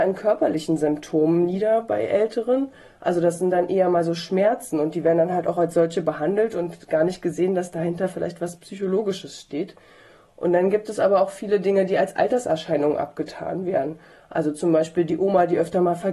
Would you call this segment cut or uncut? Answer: uncut